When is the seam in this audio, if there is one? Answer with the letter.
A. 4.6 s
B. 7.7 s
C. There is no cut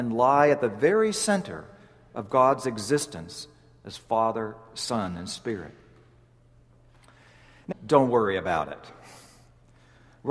B